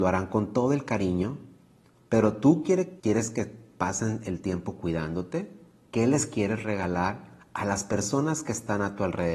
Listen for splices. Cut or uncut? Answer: cut